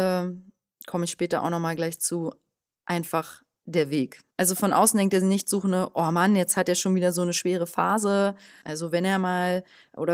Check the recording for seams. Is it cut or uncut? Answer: cut